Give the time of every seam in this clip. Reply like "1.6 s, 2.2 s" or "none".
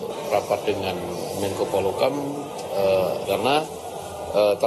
3.2 s